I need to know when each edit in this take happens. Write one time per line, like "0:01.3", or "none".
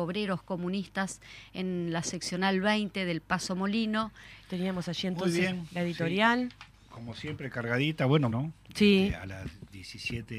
0:04.4
0:08.3